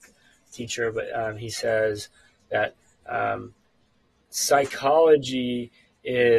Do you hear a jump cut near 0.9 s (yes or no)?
no